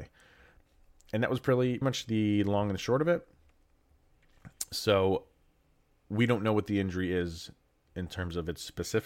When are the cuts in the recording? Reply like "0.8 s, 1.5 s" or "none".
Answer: 1.8 s